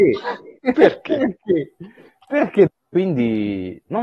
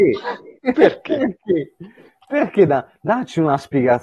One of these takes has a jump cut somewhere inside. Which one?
first; 1 cut; at 2.7 s

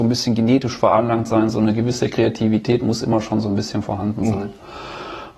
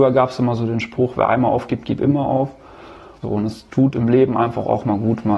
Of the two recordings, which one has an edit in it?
second; 1 cut; at 3.2 s

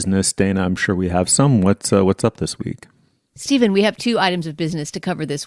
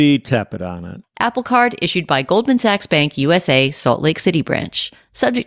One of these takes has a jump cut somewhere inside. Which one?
second; 1 cut; at 1.0 s

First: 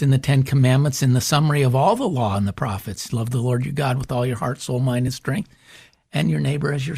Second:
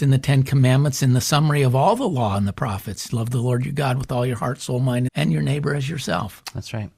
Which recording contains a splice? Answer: second; 1 cut; at 5.1 s

